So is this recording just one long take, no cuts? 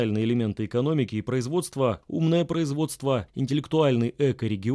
no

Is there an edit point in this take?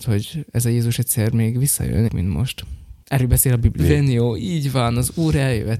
yes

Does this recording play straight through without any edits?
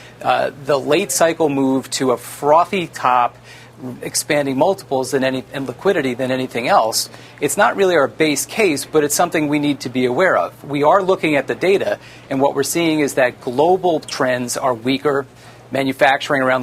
no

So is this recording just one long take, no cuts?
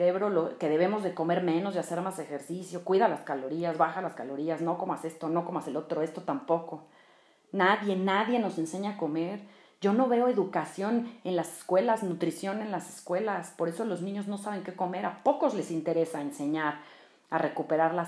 yes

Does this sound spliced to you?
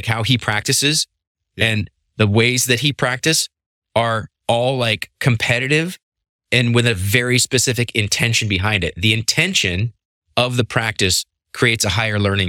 no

